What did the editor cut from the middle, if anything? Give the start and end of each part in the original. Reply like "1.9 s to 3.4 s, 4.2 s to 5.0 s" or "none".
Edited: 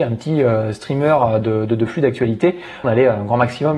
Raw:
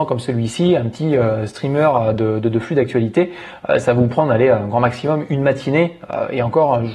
3.6 s to 4.3 s